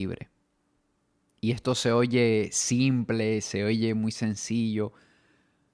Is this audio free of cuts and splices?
yes; 0 cuts

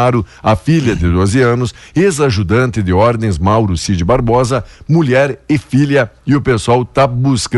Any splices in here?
no; 0 cuts

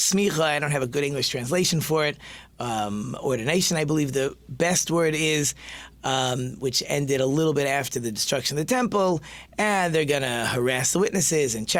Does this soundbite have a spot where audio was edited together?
no; 0 cuts

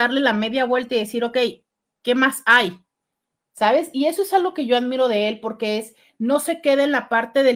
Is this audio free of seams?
yes; 0 cuts

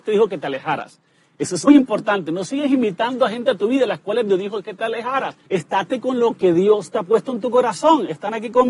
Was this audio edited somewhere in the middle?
yes; 2 cuts; at 1.7 s, 5.5 s

